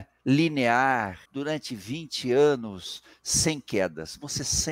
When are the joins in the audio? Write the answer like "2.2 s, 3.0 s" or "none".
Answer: 1.3 s